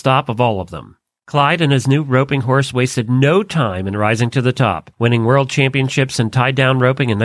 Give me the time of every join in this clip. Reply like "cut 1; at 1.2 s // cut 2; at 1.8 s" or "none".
cut 1; at 4.9 s